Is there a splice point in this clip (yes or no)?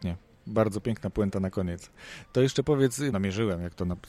yes